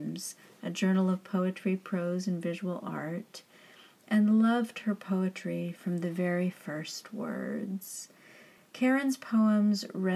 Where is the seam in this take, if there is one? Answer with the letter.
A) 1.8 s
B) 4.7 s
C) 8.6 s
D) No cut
D